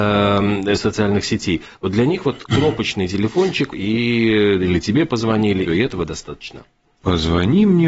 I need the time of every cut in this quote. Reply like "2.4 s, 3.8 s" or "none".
3.7 s, 5.7 s